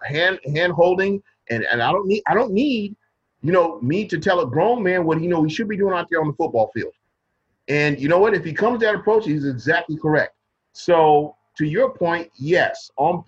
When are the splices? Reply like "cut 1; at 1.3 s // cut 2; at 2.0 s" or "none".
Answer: cut 1; at 11.5 s